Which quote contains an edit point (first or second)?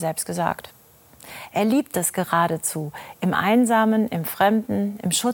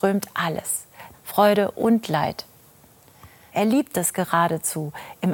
second